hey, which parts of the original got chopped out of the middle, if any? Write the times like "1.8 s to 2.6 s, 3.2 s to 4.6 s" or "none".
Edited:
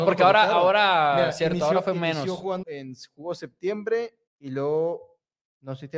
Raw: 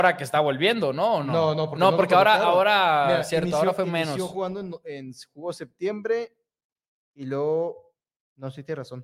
4.5 s to 4.8 s, 6.4 s to 7.0 s